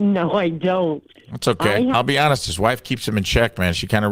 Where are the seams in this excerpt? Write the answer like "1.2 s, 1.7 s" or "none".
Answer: 1.9 s